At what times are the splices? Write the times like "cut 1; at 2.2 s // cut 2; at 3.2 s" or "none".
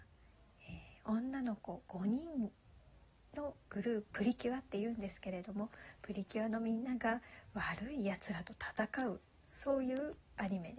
cut 1; at 4.1 s